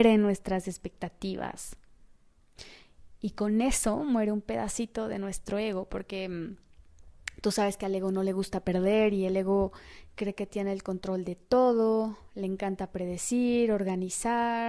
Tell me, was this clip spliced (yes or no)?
no